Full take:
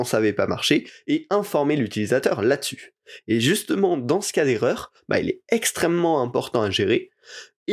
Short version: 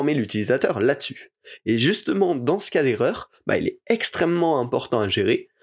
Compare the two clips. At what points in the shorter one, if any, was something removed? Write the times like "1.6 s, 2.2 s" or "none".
none